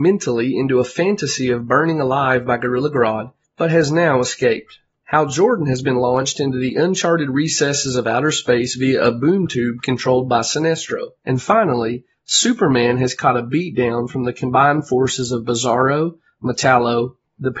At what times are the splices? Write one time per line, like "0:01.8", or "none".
0:05.0
0:11.2